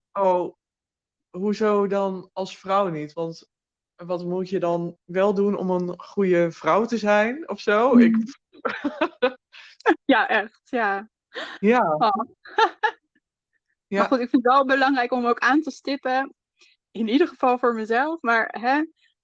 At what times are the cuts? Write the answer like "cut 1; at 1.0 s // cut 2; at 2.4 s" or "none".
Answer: none

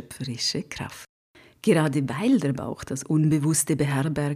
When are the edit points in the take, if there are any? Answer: none

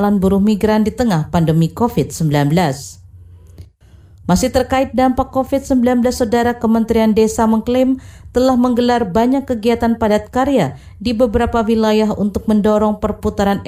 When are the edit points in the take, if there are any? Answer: cut 1; at 4.2 s

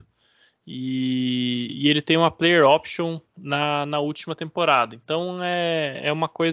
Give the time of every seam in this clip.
none

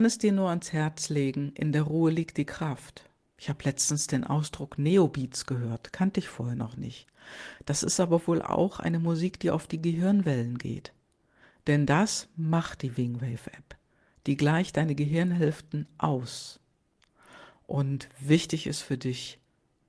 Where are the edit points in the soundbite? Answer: cut 1; at 3.3 s

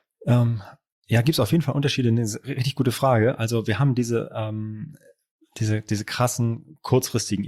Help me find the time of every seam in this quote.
none

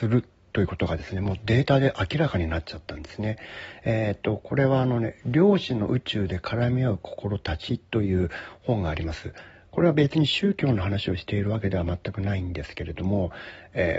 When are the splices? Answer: cut 1; at 9.7 s

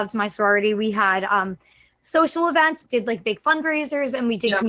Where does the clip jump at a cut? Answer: cut 1; at 2.8 s

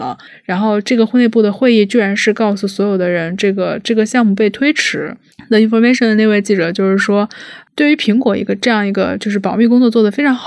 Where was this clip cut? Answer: none

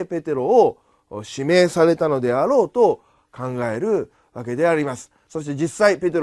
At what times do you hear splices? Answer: none

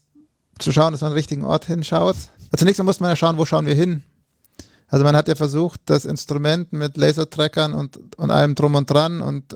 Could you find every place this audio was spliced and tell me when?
cut 1; at 2.5 s

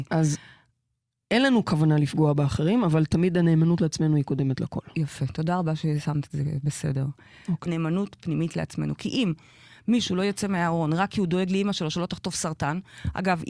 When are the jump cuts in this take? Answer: cut 1; at 7.7 s

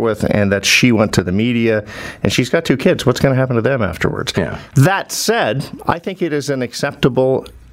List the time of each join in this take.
cut 1; at 4.7 s

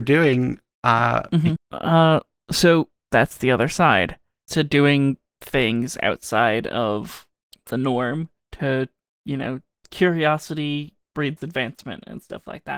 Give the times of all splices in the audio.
cut 1; at 1.6 s // cut 2; at 4.5 s

